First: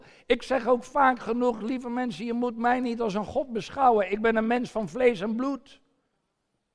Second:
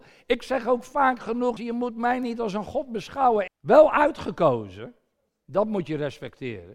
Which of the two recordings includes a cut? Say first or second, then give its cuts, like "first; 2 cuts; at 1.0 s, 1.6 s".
second; 2 cuts; at 1.6 s, 3.5 s